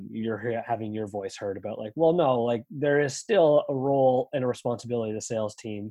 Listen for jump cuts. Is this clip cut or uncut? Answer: uncut